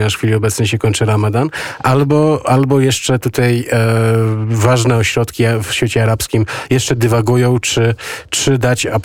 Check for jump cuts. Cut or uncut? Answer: uncut